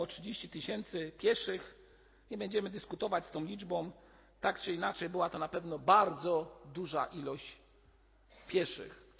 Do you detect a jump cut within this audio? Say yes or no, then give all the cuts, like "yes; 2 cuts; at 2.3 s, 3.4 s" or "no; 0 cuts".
no; 0 cuts